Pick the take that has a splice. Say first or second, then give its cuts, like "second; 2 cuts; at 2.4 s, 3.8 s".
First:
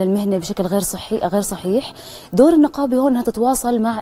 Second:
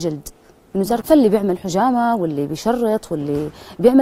second; 1 cut; at 1.0 s